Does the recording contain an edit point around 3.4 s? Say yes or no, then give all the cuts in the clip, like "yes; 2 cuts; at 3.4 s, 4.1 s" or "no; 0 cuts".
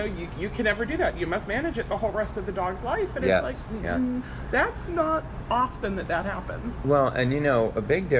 no; 0 cuts